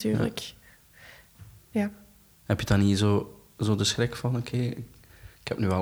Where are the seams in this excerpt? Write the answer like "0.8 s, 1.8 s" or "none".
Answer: none